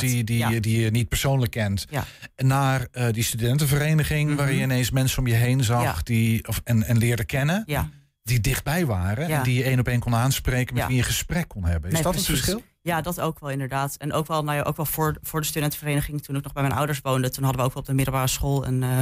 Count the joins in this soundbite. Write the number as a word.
zero